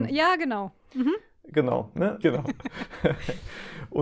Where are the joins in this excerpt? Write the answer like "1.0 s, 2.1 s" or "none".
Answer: 2.2 s